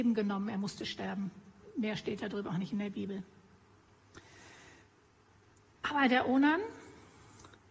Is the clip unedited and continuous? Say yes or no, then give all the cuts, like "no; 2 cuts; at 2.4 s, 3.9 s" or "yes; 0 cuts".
no; 1 cut; at 5.7 s